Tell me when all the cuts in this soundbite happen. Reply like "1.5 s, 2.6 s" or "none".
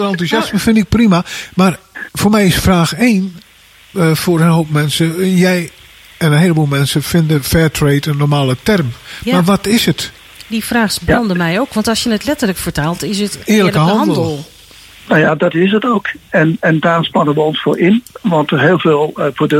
none